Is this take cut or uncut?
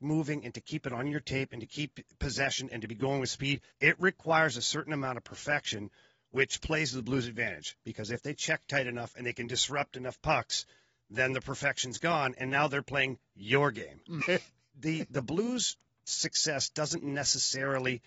cut